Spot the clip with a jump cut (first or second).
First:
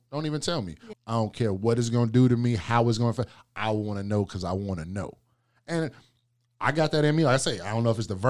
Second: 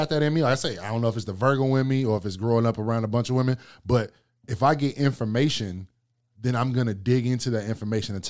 first